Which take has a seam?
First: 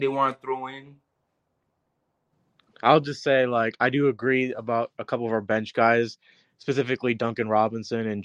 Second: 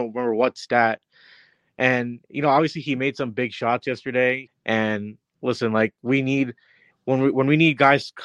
second; 1 cut; at 4.5 s

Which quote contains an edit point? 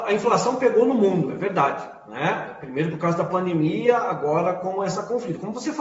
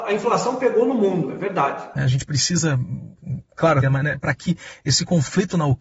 second; 2 cuts; at 2.0 s, 3.8 s

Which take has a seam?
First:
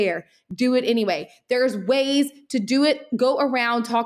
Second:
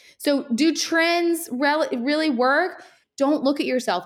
second; 1 cut; at 3.0 s

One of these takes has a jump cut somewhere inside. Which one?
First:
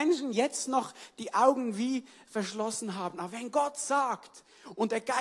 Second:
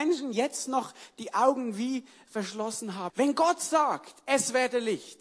second; 1 cut; at 3.1 s

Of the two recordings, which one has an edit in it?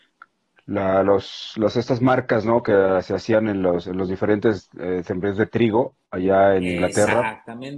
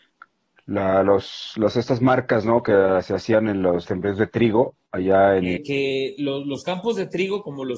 second; 2 cuts; at 3.8 s, 5.6 s

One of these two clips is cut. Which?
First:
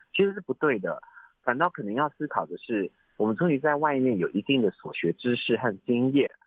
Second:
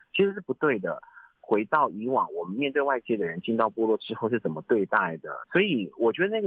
second; 2 cuts; at 1.4 s, 5.4 s

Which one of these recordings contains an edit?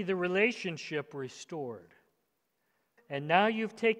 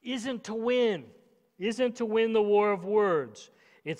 first; 1 cut; at 3.0 s

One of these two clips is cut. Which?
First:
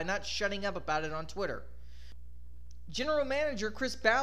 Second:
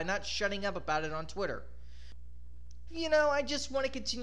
second; 1 cut; at 2.9 s

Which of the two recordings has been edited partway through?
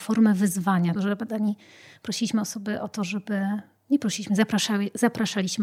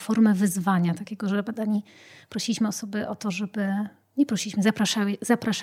first; 1 cut; at 1.0 s

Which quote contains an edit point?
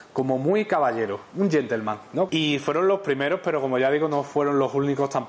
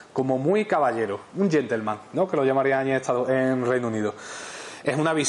first; 1 cut; at 2.3 s

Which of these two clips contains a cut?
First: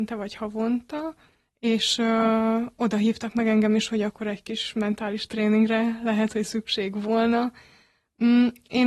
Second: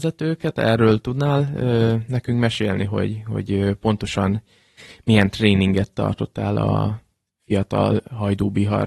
first; 1 cut; at 1.5 s

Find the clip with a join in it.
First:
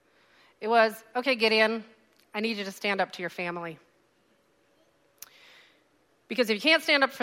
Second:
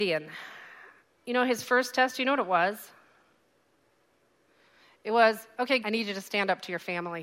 second; 1 cut; at 5.8 s

